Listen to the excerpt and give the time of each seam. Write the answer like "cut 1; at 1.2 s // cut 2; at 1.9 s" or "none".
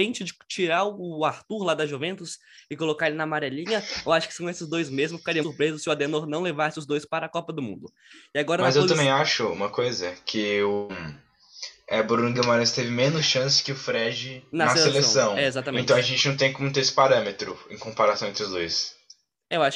cut 1; at 5.4 s